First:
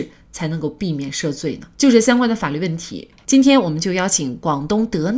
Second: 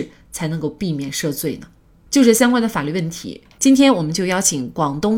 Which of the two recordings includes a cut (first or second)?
first